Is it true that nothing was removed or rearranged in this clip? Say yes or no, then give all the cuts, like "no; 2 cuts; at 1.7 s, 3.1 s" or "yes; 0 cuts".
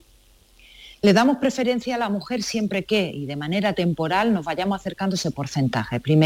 yes; 0 cuts